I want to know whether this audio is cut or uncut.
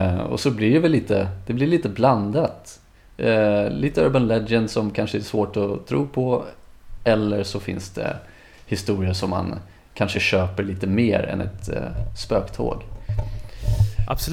uncut